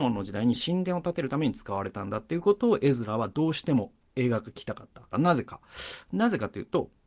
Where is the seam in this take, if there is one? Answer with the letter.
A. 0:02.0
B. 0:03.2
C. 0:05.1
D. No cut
C